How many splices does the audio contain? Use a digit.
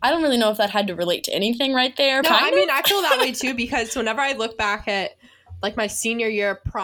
1